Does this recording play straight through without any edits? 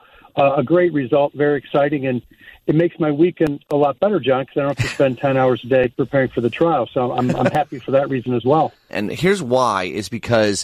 no; 1 cut; at 8.9 s

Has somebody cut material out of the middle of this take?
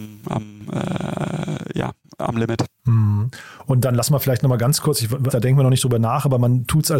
yes; 1 cut; at 5.3 s

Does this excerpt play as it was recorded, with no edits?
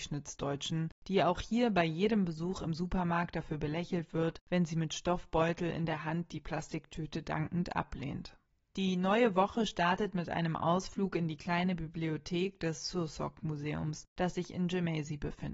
yes; 0 cuts

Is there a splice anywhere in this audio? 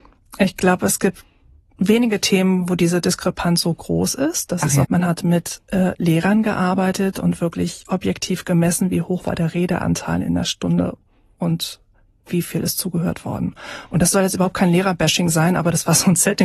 yes; 1 cut; at 4.8 s

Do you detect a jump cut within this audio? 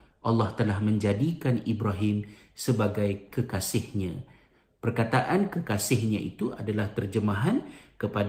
no; 0 cuts

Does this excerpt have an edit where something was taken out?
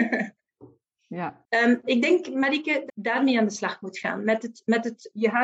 yes; 2 cuts; at 1.4 s, 2.9 s

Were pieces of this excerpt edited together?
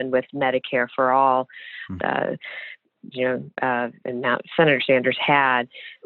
yes; 2 cuts; at 2.0 s, 3.1 s

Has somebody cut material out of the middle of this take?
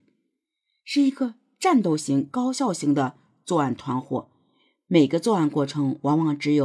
no; 0 cuts

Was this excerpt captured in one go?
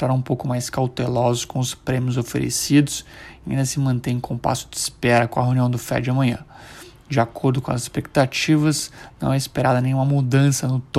yes; 0 cuts

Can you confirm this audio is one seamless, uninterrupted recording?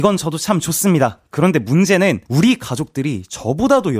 no; 1 cut; at 2.3 s

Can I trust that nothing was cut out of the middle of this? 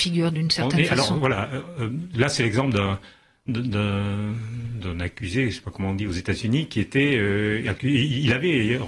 yes; 0 cuts

